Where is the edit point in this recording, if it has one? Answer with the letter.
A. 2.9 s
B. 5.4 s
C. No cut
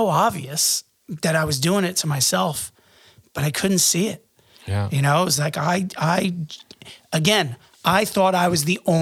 C